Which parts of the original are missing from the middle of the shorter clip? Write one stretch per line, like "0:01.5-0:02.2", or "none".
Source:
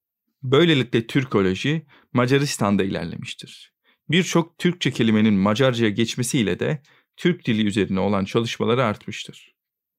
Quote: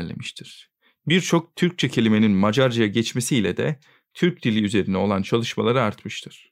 none